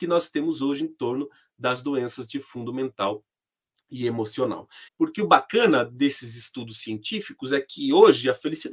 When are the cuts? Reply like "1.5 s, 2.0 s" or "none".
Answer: 4.9 s